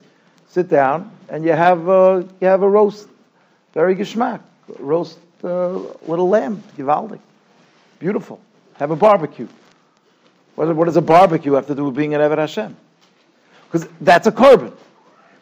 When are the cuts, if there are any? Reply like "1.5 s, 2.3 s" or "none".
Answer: none